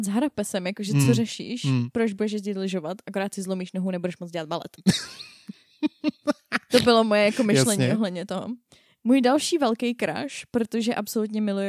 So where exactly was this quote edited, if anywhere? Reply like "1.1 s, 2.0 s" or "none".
none